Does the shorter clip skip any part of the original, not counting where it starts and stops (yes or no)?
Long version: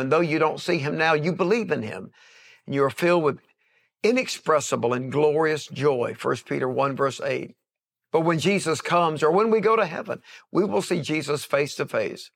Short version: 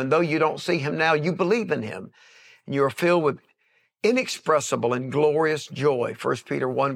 no